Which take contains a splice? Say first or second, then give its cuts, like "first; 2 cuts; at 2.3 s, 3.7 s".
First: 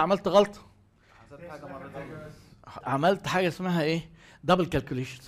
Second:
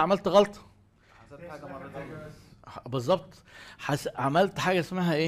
first; 1 cut; at 2.8 s